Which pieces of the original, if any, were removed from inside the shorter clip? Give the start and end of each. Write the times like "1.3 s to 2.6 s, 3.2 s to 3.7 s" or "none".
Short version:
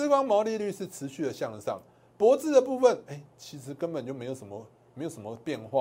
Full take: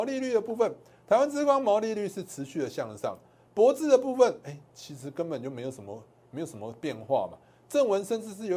none